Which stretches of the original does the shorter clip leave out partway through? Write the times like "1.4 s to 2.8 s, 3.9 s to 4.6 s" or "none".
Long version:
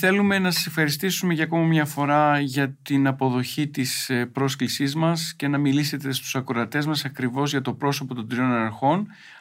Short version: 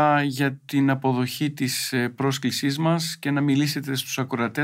none